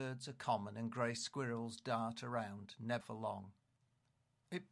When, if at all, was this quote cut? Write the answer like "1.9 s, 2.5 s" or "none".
3.0 s